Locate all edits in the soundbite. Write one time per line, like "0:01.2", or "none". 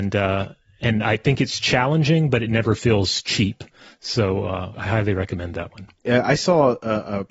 0:04.7
0:06.0